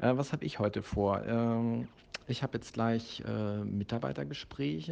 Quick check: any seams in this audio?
no; 0 cuts

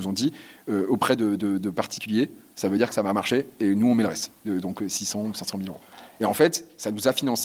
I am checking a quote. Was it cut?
no; 0 cuts

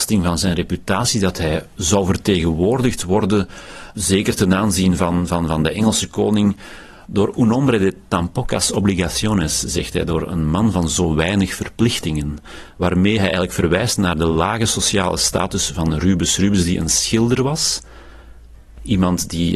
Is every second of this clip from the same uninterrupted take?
yes; 0 cuts

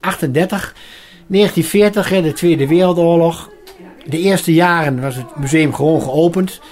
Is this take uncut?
yes; 0 cuts

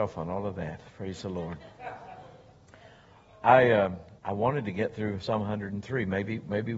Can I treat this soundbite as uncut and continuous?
no; 1 cut; at 4.2 s

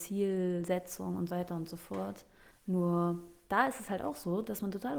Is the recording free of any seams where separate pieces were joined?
no; 1 cut; at 1.3 s

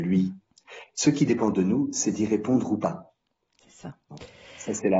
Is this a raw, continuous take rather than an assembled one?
yes; 0 cuts

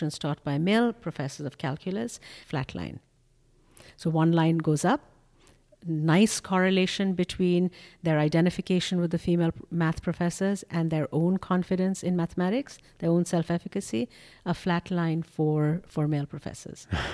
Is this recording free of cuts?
no; 1 cut; at 2.4 s

